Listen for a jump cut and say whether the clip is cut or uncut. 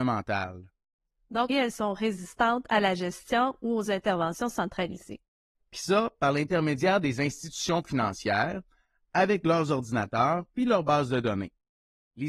cut